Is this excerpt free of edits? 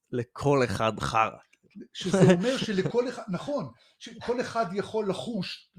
yes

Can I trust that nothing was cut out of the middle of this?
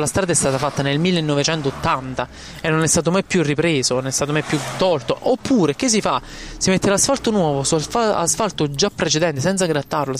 yes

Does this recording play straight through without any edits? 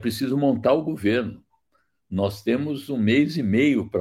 yes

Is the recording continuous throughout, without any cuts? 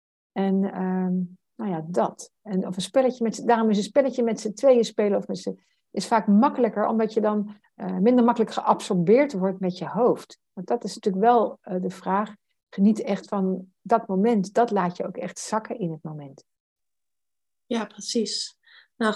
no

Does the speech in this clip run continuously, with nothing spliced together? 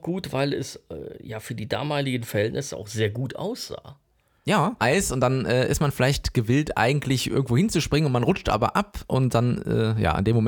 no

